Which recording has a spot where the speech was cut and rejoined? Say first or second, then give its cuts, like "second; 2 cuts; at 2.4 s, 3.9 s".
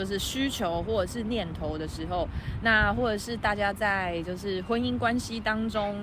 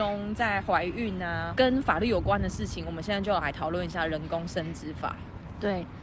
second; 1 cut; at 1.6 s